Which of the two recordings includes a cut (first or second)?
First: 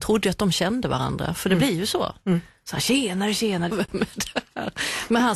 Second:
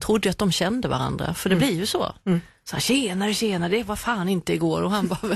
first